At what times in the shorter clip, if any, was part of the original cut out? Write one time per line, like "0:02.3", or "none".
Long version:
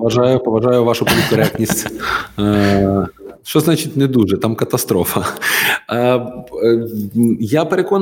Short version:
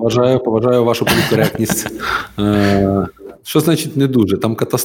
none